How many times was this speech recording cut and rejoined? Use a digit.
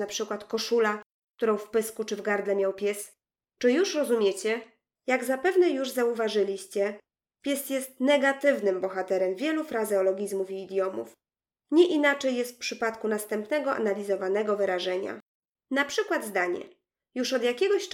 2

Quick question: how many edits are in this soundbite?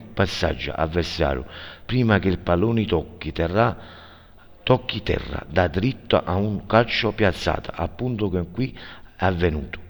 0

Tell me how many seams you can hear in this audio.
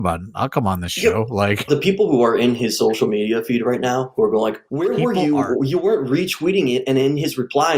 2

